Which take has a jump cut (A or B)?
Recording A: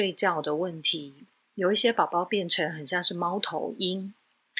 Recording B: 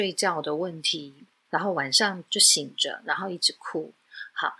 B